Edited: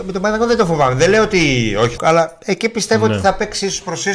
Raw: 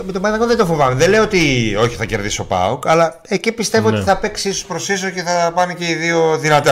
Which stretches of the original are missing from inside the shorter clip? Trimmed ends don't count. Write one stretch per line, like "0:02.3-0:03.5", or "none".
0:02.0-0:02.8